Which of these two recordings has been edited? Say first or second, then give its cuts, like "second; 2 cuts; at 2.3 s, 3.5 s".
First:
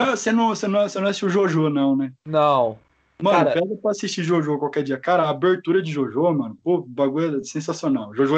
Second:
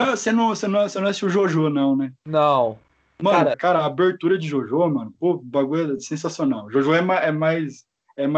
second; 1 cut; at 3.5 s